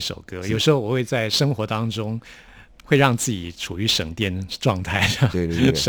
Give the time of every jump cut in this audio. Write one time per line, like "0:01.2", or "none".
none